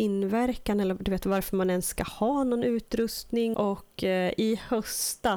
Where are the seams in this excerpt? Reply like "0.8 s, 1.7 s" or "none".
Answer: 3.5 s